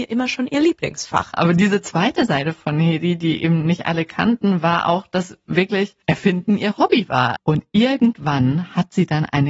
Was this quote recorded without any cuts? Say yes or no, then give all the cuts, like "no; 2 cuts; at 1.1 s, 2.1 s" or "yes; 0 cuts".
no; 3 cuts; at 1.3 s, 6.0 s, 7.4 s